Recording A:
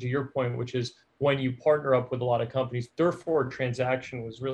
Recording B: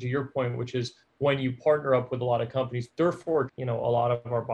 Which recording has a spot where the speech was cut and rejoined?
B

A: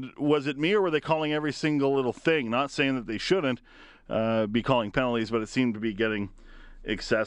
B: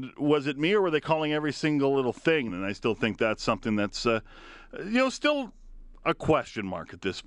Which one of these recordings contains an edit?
B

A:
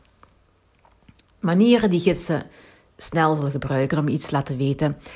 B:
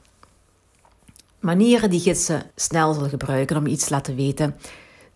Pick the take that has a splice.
B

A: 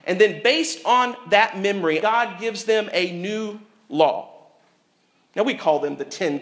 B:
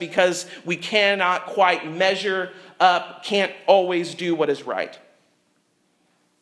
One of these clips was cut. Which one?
A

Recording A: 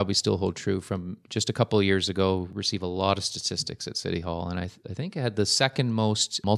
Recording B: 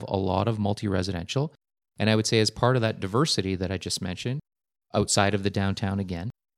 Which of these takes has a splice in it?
B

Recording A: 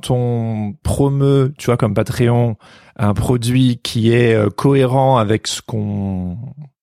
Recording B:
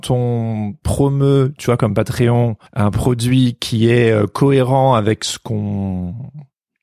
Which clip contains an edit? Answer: B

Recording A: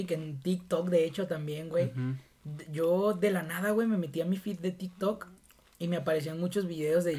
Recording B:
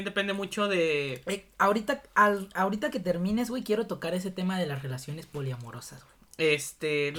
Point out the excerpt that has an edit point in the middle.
B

